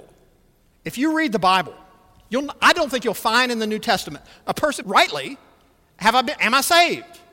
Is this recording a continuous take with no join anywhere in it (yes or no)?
no